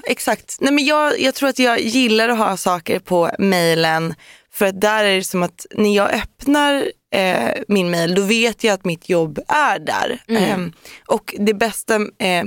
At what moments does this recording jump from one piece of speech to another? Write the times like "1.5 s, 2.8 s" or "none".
none